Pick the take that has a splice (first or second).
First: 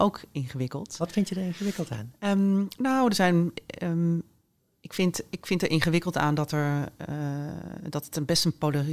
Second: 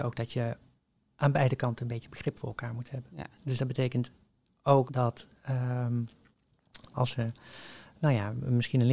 second